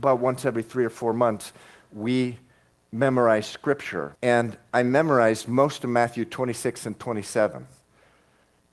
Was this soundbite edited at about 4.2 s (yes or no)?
yes